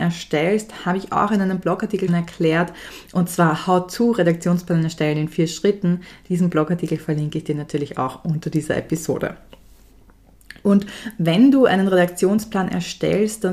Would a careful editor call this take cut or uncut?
cut